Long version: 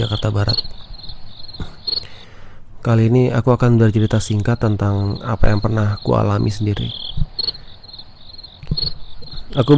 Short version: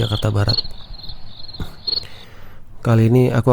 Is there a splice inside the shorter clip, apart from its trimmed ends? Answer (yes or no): no